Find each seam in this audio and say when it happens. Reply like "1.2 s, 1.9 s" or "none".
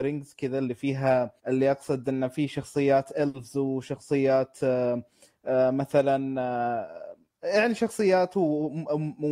1.4 s